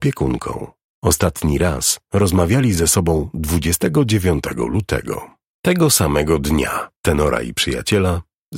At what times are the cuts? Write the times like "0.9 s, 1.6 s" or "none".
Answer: 7.0 s

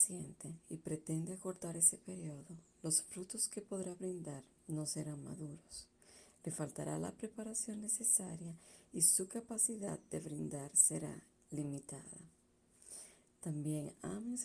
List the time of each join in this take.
none

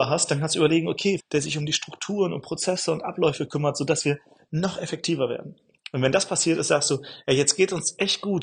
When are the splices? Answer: 1.2 s

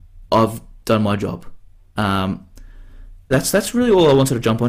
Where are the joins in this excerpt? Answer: 2.0 s, 3.3 s

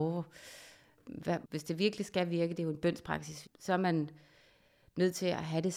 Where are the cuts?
1.4 s, 3.4 s

